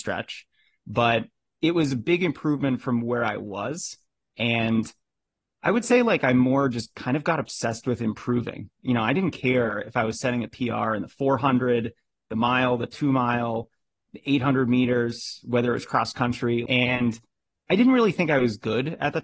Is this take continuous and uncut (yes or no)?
no